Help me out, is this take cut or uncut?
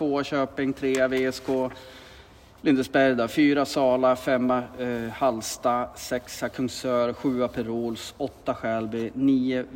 uncut